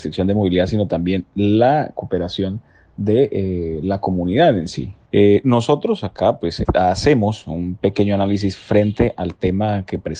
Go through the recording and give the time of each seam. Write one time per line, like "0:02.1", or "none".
0:05.1
0:06.6